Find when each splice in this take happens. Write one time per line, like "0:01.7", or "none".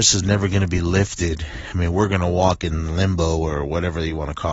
none